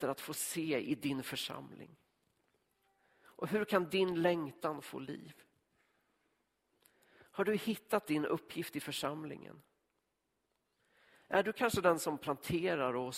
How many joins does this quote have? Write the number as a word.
zero